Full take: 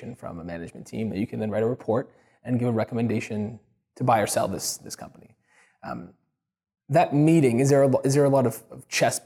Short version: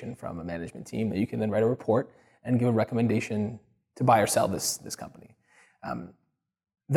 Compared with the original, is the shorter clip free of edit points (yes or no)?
yes